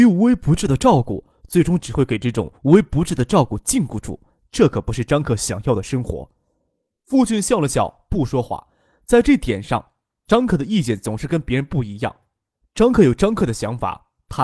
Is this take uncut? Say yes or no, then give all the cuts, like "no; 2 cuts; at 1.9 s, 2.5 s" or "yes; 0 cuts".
yes; 0 cuts